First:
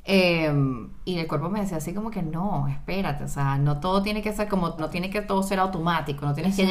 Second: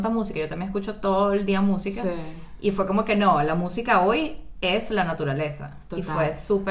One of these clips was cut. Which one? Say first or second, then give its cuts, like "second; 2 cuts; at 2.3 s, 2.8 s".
first; 1 cut; at 4.8 s